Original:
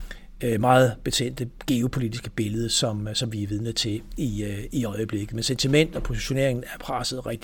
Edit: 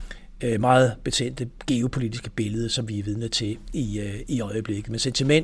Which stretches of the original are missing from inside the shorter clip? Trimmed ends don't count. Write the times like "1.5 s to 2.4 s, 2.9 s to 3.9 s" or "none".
2.7 s to 3.1 s